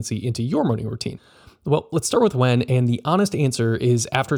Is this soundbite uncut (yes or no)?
yes